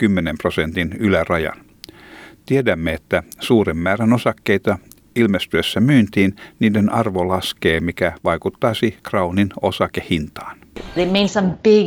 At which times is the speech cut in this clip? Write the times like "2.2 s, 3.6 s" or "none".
9.0 s